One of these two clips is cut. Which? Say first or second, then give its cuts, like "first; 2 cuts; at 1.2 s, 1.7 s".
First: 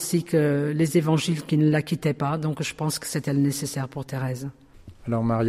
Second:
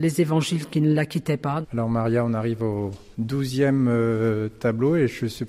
second; 2 cuts; at 1.6 s, 3.1 s